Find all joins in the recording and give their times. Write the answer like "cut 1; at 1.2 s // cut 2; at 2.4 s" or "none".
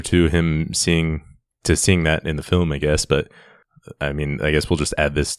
none